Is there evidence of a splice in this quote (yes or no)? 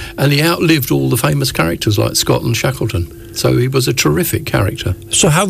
no